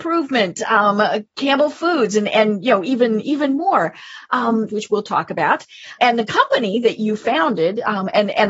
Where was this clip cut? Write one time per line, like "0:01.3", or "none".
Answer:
0:04.7
0:06.0